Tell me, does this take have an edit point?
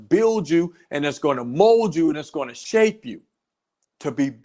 no; 0 cuts

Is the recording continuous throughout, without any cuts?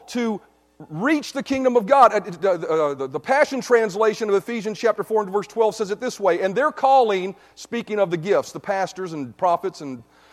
no; 1 cut; at 3.0 s

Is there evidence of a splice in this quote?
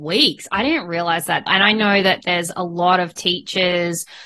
yes; 1 cut; at 1.5 s

